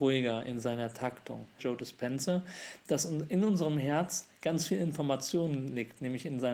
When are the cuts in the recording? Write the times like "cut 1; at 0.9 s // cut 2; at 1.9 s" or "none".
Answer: cut 1; at 1.6 s